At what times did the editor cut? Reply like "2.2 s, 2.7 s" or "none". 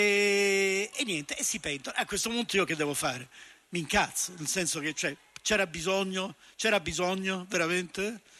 0.9 s